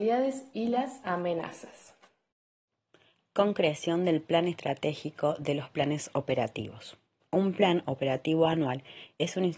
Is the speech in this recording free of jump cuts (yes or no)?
no